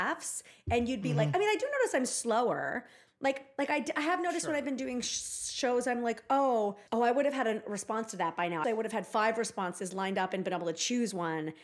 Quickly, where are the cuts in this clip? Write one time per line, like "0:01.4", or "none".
0:06.9
0:08.6